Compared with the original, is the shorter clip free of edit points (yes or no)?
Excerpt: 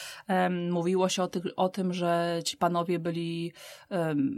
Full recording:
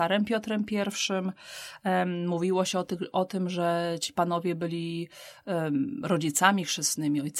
yes